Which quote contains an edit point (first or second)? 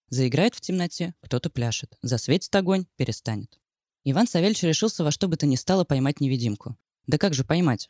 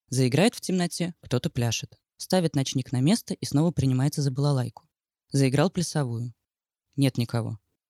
second